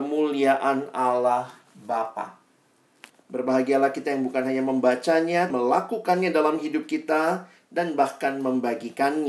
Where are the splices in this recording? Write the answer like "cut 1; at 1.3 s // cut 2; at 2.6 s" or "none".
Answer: cut 1; at 3.1 s // cut 2; at 5.5 s